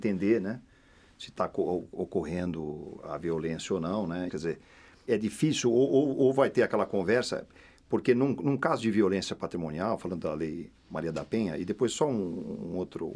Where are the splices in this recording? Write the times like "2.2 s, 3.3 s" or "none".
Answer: 4.3 s